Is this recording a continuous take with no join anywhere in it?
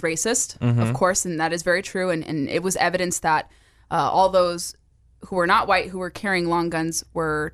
yes; 0 cuts

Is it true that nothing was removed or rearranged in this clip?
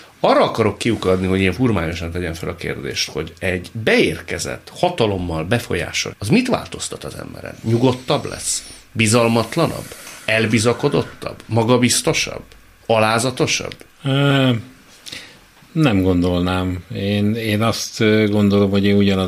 no; 1 cut; at 6.1 s

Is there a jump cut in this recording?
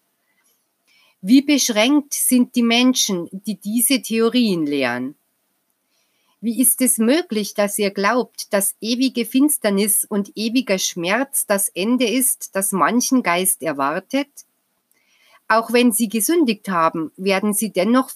no; 0 cuts

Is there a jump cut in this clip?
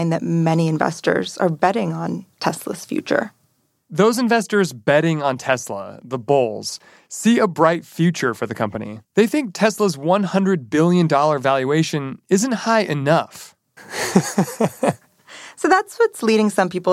yes; 2 cuts; at 9.1 s, 13.8 s

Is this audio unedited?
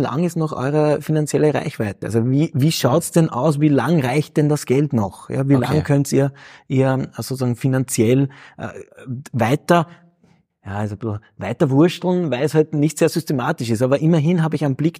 yes; 0 cuts

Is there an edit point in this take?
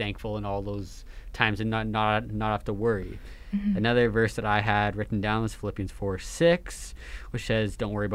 no; 0 cuts

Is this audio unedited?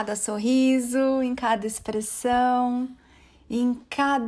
yes; 0 cuts

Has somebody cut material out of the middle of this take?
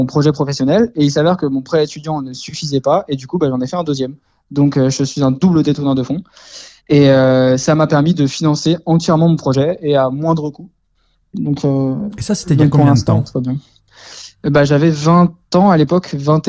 no; 0 cuts

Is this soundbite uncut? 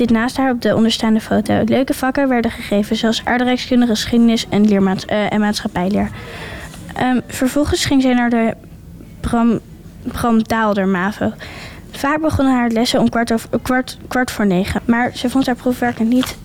no; 1 cut; at 14.8 s

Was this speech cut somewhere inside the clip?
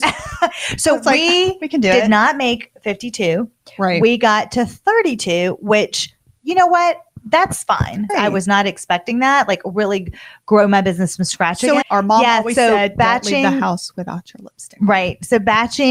yes; 2 cuts; at 8.1 s, 11.8 s

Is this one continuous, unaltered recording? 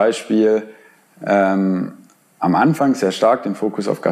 yes; 0 cuts

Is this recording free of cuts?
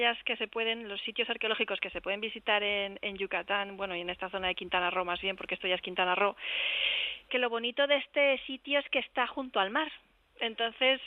no; 1 cut; at 7.3 s

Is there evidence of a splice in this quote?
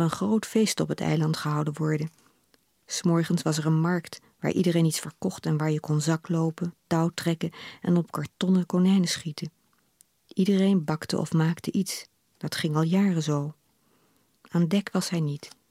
yes; 1 cut; at 14.4 s

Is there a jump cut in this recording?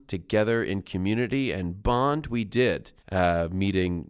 yes; 1 cut; at 3.0 s

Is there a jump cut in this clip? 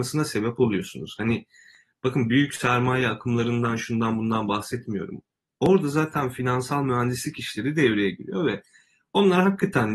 no; 0 cuts

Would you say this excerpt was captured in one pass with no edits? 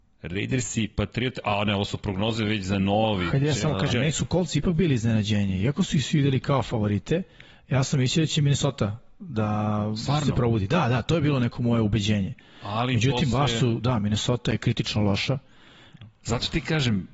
yes; 0 cuts

